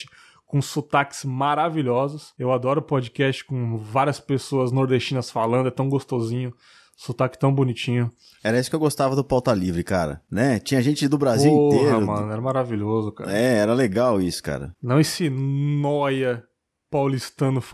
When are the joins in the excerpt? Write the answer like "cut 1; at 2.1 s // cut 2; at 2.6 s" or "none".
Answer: none

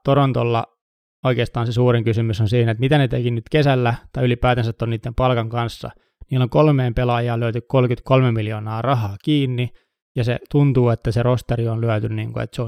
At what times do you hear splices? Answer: none

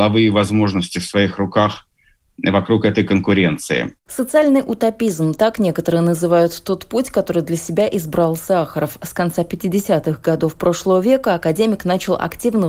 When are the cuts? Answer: none

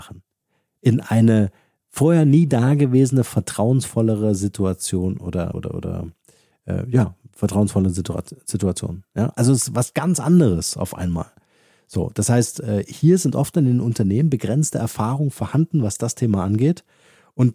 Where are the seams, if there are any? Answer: cut 1; at 5.5 s

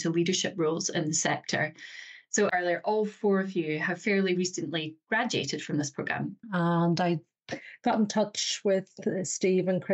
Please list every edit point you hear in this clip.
cut 1; at 2.5 s // cut 2; at 6.4 s

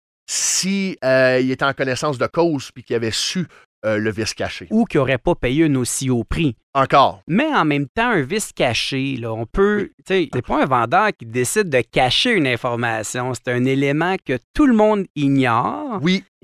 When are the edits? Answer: cut 1; at 10.3 s

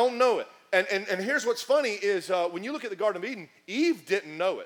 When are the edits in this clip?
none

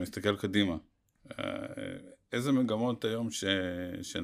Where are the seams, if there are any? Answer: none

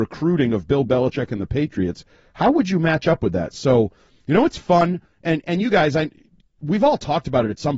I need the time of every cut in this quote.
none

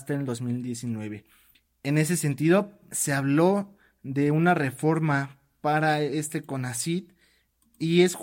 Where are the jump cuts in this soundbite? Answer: cut 1; at 1.7 s // cut 2; at 2.9 s

